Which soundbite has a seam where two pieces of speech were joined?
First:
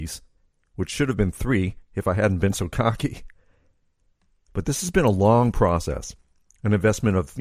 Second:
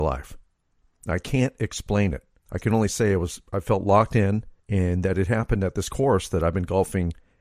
second; 2 cuts; at 2.4 s, 4.6 s

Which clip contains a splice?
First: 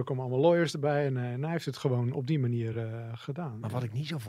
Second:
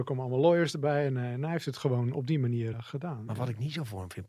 second; 1 cut; at 2.7 s

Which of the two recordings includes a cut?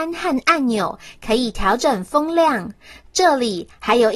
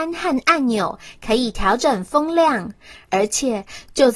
second; 1 cut; at 2.9 s

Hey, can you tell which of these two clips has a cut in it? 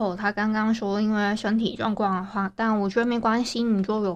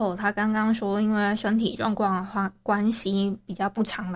first; 1 cut; at 2.6 s

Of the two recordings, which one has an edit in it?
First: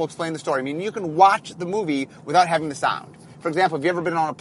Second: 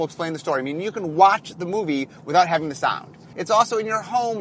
second; 1 cut; at 3.3 s

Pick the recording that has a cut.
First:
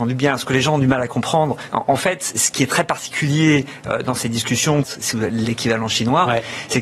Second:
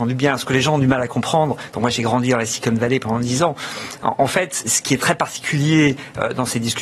first; 2 cuts; at 1.7 s, 4.8 s

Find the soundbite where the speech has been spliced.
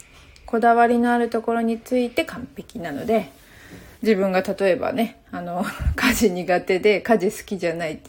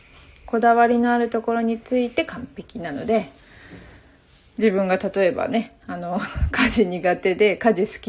first; 1 cut; at 3.9 s

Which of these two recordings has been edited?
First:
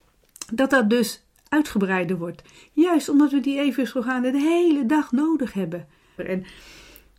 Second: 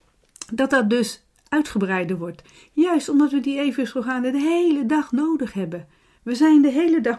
first; 1 cut; at 6.2 s

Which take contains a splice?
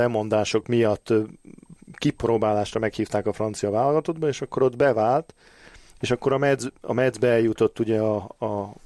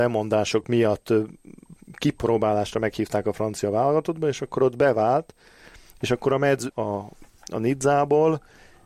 second; 1 cut; at 6.7 s

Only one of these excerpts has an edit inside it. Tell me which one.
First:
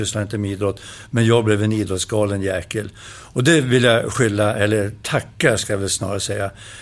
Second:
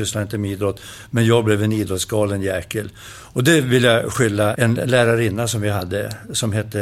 second; 1 cut; at 4.5 s

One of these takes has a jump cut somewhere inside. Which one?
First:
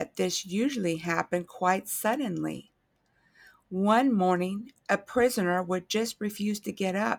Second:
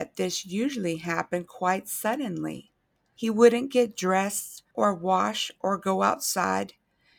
second; 2 cuts; at 3.1 s, 4.7 s

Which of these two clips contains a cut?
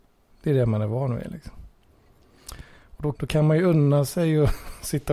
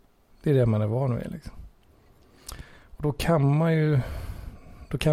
first; 1 cut; at 3.1 s

